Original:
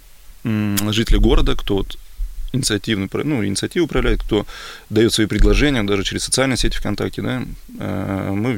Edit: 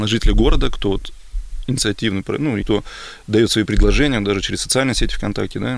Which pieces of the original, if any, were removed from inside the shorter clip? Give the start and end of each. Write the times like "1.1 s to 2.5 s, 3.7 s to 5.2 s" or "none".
3.5 s to 4.2 s